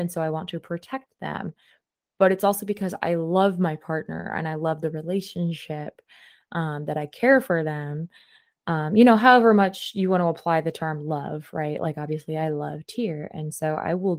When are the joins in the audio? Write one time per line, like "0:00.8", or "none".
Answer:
none